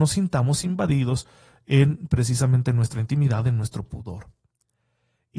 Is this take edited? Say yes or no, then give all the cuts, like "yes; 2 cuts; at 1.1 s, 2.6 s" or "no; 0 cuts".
no; 0 cuts